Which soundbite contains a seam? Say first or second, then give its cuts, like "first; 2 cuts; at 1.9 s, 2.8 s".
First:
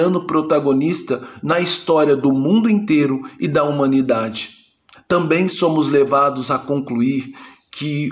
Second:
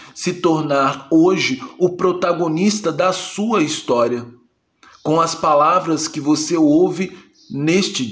first; 1 cut; at 4.9 s